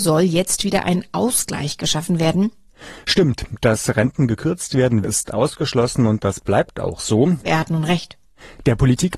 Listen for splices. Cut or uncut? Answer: cut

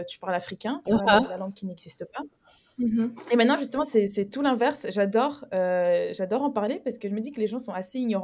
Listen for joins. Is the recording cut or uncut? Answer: uncut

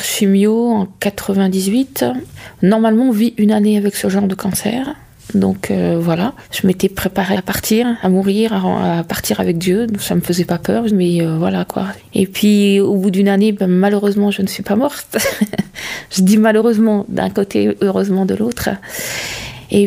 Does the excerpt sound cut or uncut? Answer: cut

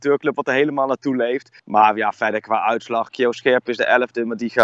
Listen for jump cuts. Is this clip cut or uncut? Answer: cut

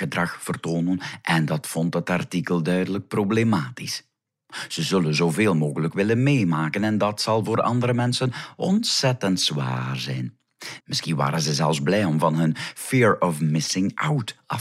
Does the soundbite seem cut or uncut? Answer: cut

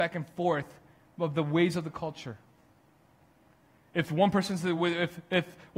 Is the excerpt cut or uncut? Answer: uncut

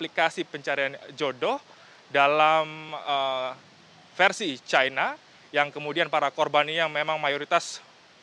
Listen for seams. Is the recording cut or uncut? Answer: uncut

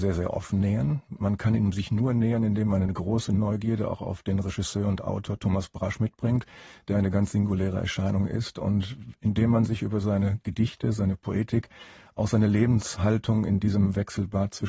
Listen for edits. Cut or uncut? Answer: uncut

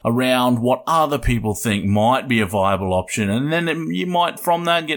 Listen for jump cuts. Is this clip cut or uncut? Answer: uncut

